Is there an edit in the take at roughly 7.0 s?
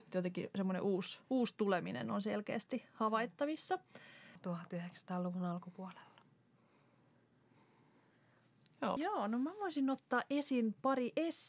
no; 3 cuts; at 1.2 s, 4.4 s, 9.0 s

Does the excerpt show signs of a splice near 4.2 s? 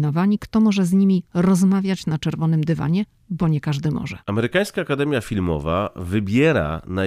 yes; 1 cut; at 4.2 s

